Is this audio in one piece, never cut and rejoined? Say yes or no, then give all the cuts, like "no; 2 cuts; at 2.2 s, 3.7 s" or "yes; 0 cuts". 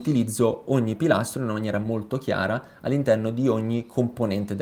yes; 0 cuts